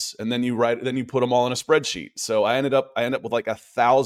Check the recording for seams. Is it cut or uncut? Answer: uncut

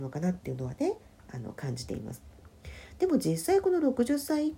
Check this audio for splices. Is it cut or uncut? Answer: uncut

